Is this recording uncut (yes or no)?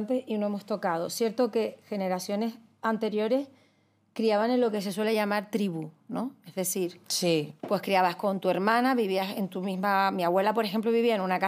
yes